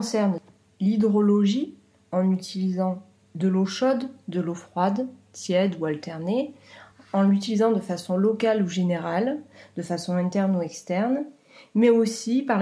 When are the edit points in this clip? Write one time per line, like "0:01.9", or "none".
none

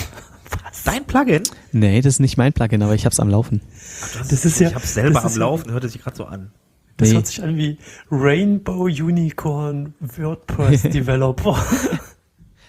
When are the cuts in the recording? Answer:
none

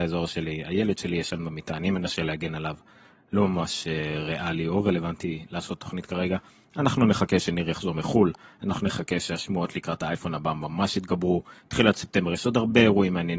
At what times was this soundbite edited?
none

